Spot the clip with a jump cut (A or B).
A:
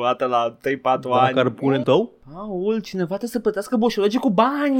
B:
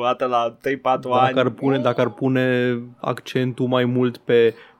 A